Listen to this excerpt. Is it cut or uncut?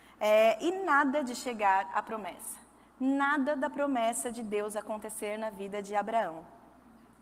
uncut